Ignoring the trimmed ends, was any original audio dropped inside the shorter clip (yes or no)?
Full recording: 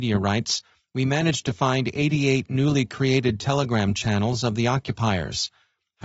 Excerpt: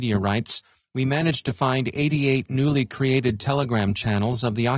no